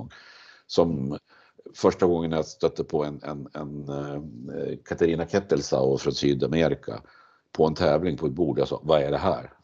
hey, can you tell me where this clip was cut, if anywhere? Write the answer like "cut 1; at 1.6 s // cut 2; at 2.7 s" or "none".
none